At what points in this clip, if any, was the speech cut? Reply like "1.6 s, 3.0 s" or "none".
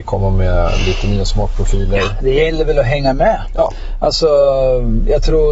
none